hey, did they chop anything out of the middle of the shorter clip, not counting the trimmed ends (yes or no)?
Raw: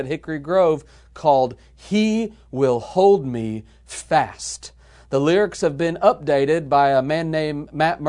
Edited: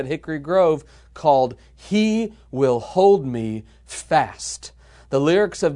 no